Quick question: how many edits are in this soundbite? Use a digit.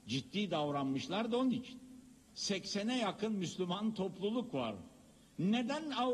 1